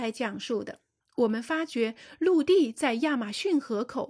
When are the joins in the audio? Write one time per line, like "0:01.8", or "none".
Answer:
0:01.0